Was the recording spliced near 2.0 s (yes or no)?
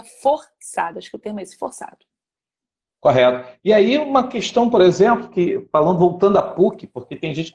no